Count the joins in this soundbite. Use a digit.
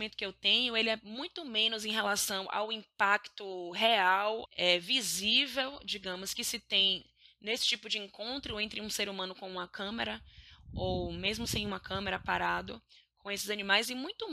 1